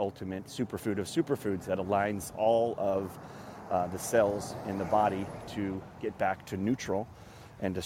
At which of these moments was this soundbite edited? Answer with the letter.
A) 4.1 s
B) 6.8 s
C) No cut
C